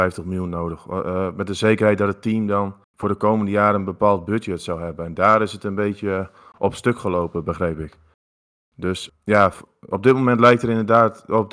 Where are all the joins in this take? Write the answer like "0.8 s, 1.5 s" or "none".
9.5 s